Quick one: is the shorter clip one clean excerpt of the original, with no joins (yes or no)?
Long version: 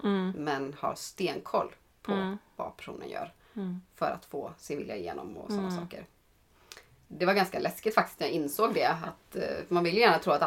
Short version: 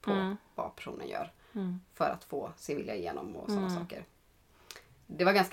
yes